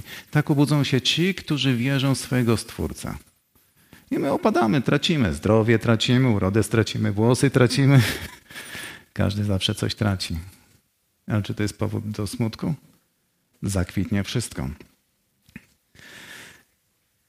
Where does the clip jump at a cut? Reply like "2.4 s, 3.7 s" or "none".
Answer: 13.5 s